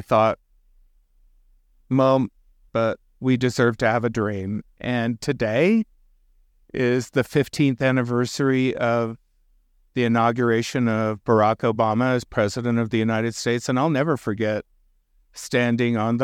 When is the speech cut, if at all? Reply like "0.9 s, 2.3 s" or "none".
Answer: 2.7 s